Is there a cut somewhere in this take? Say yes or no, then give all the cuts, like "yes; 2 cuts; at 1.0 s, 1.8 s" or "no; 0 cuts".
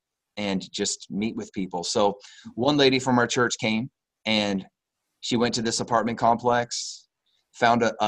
no; 0 cuts